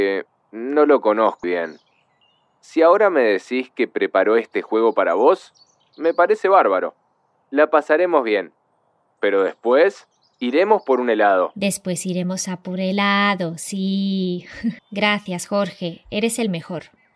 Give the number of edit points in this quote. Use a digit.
2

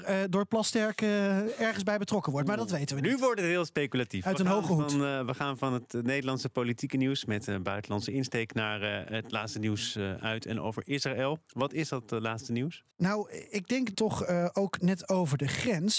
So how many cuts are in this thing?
2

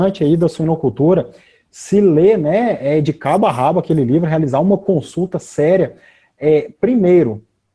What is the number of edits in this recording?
0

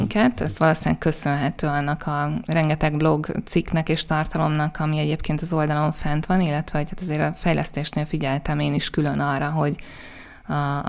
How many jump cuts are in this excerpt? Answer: 0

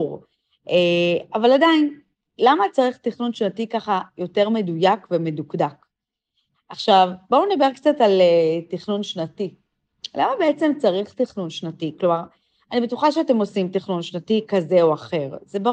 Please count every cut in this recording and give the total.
1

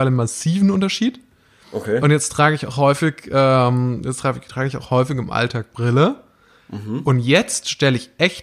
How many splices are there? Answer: 0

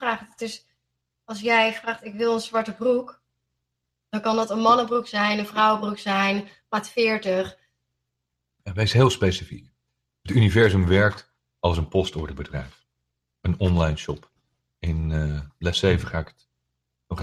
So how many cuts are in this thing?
0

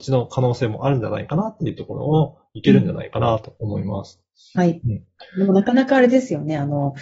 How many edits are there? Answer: 0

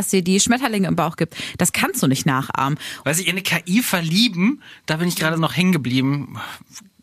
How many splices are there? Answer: 2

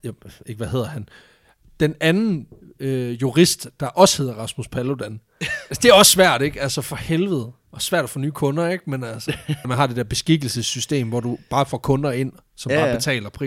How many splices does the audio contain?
1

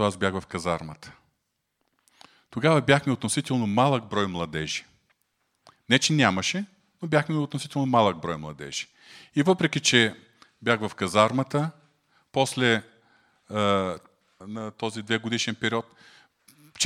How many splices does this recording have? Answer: 1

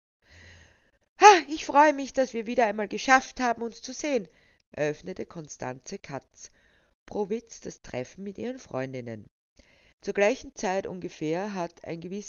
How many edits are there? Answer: 1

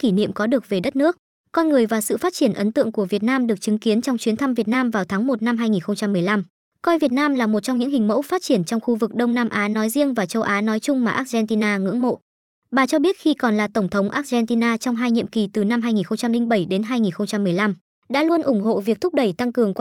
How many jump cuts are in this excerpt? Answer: 0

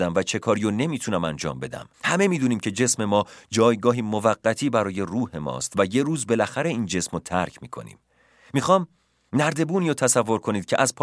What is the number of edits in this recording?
1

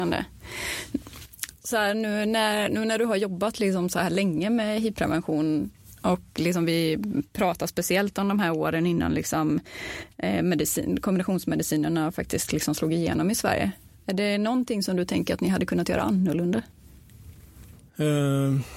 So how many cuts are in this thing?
1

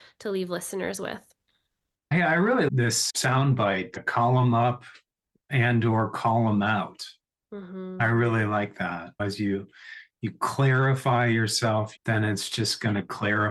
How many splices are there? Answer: 1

